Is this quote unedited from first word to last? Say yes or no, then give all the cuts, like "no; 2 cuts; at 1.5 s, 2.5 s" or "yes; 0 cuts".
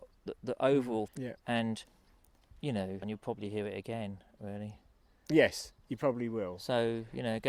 no; 2 cuts; at 1.1 s, 3.0 s